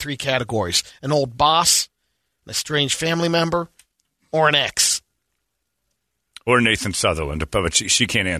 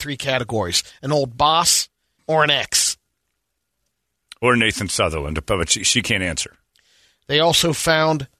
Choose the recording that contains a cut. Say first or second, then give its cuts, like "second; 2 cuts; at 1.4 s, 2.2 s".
second; 1 cut; at 2.2 s